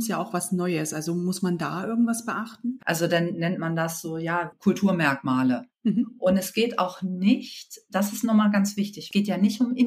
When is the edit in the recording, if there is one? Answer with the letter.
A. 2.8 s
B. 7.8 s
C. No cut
A